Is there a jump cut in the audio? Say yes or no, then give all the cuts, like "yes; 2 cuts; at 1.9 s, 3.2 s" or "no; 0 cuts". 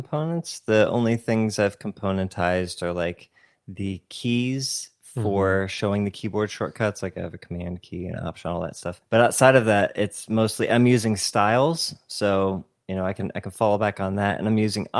no; 0 cuts